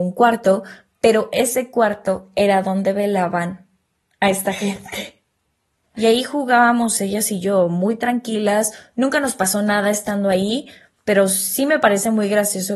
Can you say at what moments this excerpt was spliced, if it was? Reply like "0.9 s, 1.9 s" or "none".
5.9 s